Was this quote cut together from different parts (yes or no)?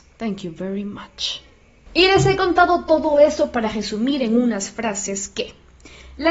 no